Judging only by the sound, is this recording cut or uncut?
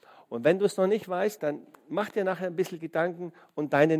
cut